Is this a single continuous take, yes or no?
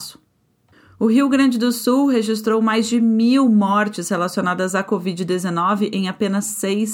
yes